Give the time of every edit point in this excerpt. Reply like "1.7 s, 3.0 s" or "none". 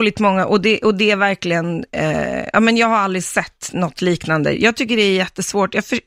4.5 s